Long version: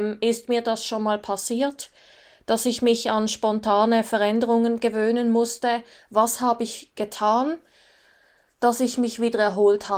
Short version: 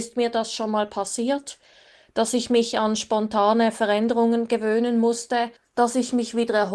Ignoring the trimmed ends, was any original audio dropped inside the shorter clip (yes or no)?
yes